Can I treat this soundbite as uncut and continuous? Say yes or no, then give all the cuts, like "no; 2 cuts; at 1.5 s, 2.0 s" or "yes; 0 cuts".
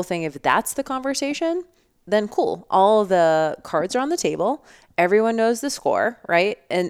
yes; 0 cuts